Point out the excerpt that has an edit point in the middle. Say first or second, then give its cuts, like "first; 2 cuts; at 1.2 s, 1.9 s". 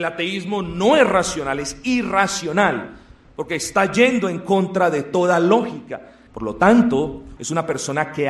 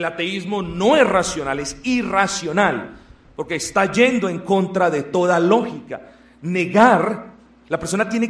first; 2 cuts; at 6.3 s, 7.4 s